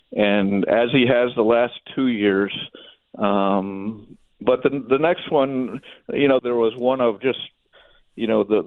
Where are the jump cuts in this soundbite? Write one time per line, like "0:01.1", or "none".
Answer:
0:06.4